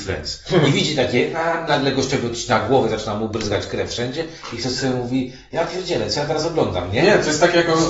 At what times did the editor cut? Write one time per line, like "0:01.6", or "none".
0:01.7